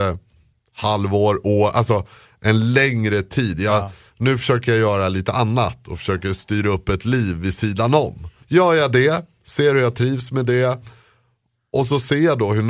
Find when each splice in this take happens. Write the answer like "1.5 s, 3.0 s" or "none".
4.1 s